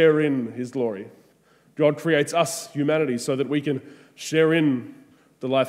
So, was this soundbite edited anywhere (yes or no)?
no